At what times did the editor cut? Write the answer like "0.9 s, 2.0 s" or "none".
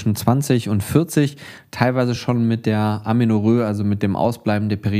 none